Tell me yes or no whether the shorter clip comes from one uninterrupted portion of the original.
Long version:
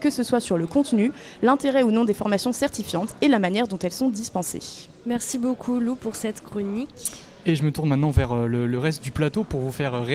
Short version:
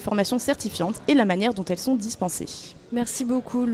yes